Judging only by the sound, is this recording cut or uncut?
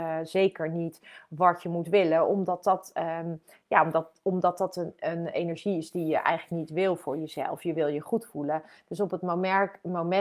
uncut